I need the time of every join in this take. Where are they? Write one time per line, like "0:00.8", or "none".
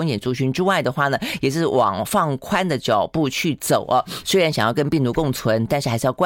0:04.2

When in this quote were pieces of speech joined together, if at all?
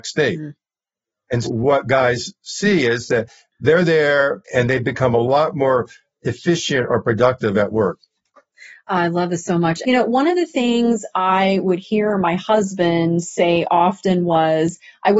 0:01.4
0:04.4
0:09.8

